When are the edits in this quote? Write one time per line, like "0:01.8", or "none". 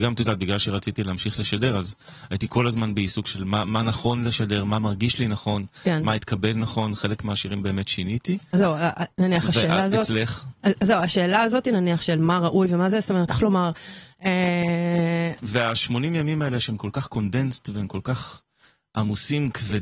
0:13.3
0:15.4